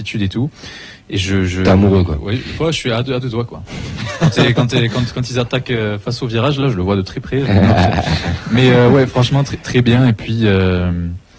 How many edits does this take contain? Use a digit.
0